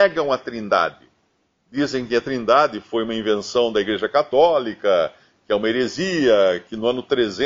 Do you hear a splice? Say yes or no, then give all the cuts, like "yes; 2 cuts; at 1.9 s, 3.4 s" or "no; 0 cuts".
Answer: no; 0 cuts